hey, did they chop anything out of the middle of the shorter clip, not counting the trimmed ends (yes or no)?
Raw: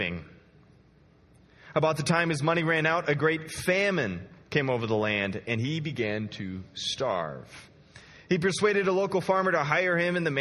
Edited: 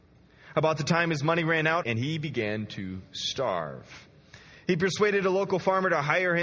yes